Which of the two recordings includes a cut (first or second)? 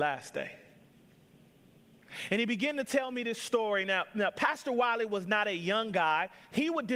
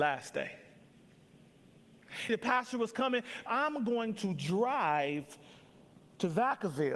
second